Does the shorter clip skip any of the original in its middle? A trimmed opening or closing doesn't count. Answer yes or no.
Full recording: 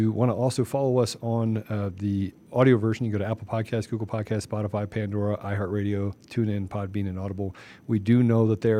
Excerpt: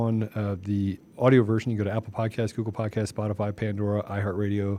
no